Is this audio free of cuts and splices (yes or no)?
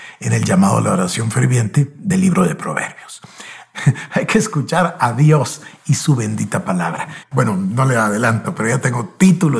no